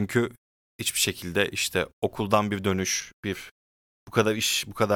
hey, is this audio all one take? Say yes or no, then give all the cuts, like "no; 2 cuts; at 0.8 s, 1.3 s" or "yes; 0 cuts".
yes; 0 cuts